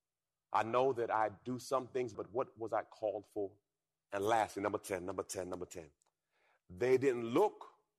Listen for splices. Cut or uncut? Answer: cut